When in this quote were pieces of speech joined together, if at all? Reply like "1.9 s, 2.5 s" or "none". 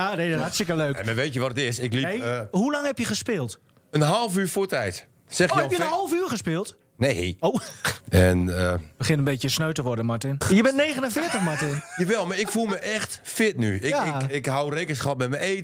8.0 s, 10.4 s

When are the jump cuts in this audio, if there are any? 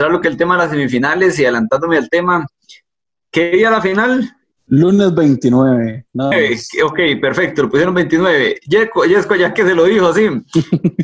4.5 s, 6.3 s

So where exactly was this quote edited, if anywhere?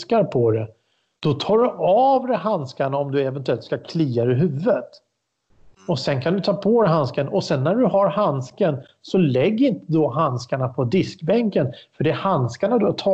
none

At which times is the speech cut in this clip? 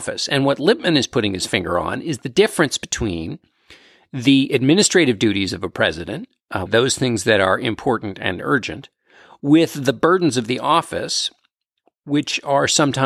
6.7 s

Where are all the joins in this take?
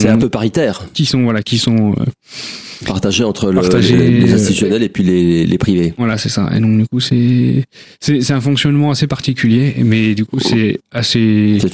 1.4 s

